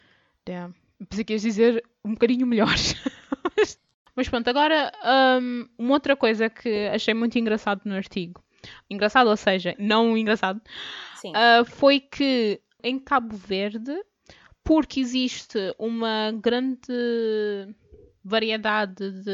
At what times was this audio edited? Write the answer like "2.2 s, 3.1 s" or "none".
9.7 s

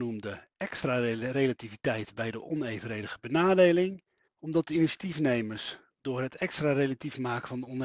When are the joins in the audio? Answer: 4.3 s

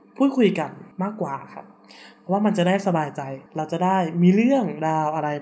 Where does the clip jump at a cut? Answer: 0.9 s, 3.5 s

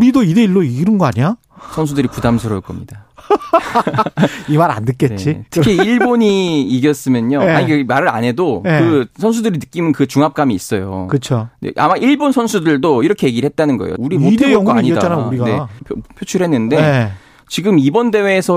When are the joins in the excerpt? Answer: 14.0 s, 15.8 s

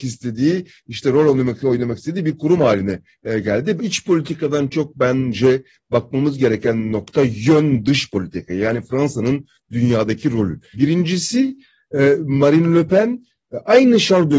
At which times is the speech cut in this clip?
3.8 s, 10.7 s

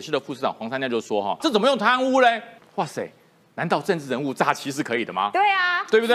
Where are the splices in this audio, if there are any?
1.4 s, 2.6 s

